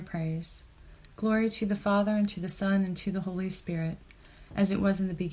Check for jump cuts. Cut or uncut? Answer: uncut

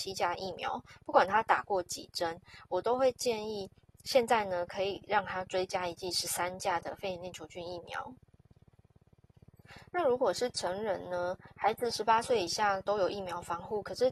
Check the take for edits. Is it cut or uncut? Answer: uncut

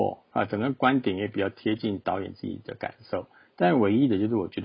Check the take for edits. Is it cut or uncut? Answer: uncut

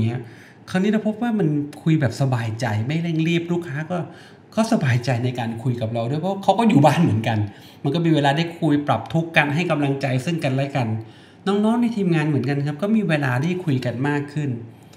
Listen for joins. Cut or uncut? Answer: uncut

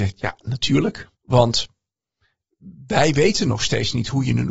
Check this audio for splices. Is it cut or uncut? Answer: cut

